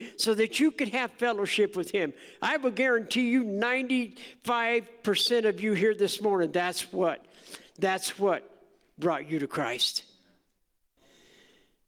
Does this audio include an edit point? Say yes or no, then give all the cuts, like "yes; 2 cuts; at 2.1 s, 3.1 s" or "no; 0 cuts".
no; 0 cuts